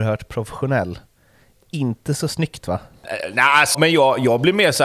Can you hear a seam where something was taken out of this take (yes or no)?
yes